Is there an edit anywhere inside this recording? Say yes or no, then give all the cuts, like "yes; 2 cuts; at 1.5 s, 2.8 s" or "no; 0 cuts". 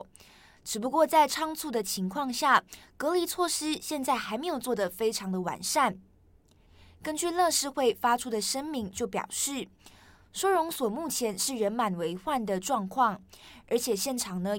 no; 0 cuts